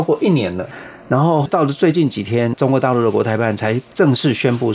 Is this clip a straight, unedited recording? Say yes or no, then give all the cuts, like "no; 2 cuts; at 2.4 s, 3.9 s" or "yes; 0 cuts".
yes; 0 cuts